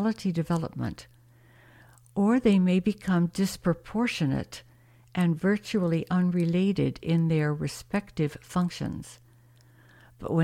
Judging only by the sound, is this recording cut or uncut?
uncut